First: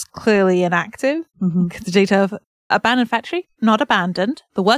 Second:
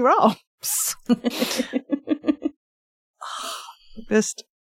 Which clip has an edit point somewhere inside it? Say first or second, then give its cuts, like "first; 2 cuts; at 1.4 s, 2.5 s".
first; 2 cuts; at 1.3 s, 2.7 s